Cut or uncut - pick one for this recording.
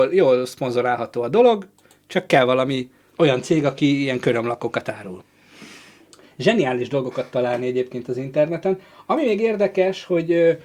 cut